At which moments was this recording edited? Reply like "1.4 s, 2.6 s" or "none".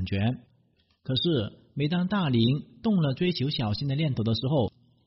none